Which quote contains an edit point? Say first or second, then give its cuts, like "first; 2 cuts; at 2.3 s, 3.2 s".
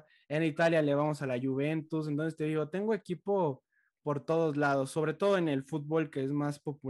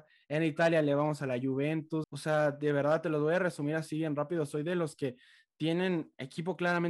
second; 1 cut; at 2.0 s